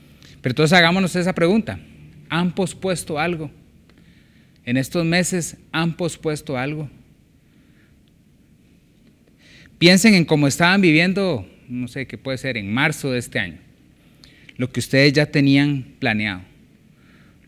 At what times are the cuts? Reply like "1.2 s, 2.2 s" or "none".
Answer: none